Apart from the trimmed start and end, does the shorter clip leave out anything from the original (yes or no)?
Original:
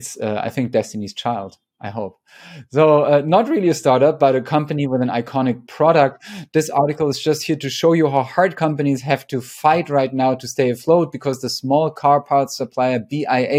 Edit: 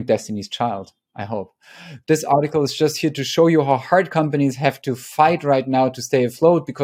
yes